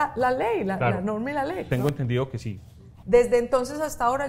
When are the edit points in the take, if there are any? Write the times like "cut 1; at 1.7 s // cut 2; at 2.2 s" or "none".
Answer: cut 1; at 1.7 s // cut 2; at 3.0 s